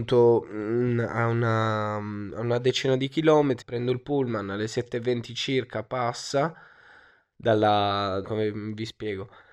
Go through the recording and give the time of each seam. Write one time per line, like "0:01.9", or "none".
0:03.6
0:08.2

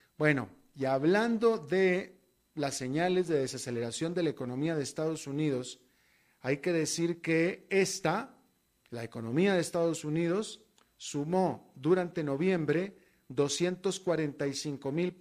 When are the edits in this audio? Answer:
none

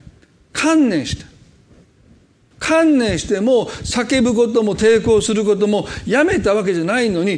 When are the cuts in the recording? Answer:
0:02.5

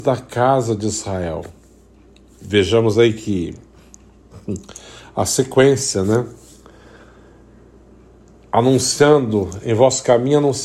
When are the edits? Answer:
none

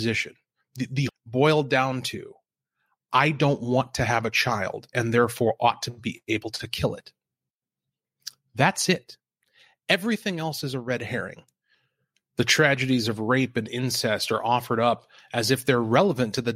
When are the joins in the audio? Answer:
0:01.1

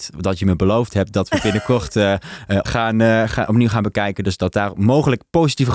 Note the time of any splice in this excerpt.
0:02.7

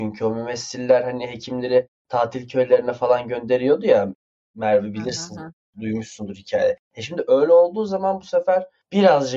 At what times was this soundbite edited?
none

